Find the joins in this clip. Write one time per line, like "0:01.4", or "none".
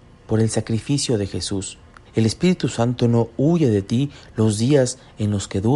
0:02.1